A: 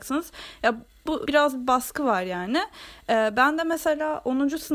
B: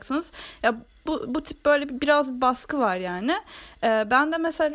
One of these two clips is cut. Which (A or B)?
A